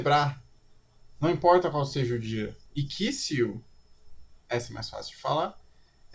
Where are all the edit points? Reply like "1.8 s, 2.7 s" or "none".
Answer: 2.7 s